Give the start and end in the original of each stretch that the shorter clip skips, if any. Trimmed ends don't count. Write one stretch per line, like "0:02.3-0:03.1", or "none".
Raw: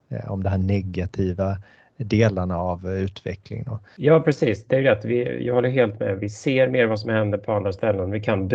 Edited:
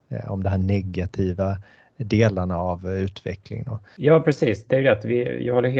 none